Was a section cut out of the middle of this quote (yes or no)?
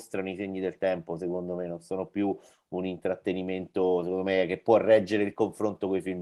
no